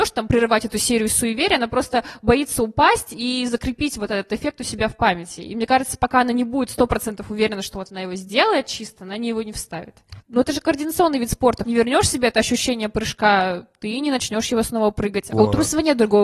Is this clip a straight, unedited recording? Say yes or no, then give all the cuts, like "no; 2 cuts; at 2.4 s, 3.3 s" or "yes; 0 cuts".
no; 3 cuts; at 10.2 s, 11.6 s, 15.3 s